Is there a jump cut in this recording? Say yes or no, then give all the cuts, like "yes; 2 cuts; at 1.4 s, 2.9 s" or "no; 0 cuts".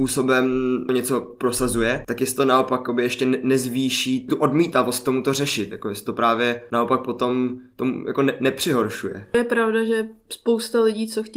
no; 0 cuts